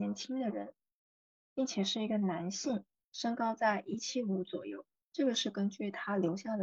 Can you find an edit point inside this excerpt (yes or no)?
no